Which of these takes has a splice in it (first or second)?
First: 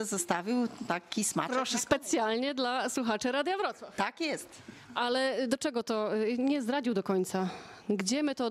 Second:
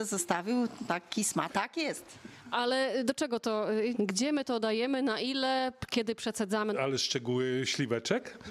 second